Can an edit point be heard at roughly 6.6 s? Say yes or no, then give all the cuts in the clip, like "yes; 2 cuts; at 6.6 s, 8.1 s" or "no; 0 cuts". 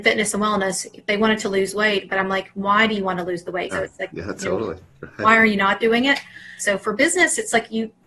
yes; 2 cuts; at 3.7 s, 6.6 s